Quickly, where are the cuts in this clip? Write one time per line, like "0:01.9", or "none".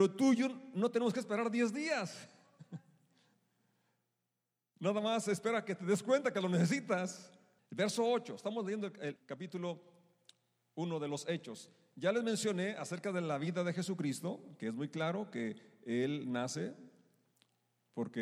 0:07.6
0:09.2